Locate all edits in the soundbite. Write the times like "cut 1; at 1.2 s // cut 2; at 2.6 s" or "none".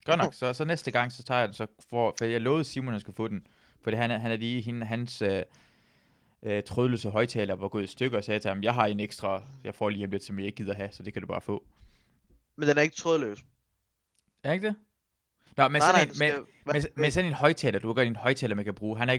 none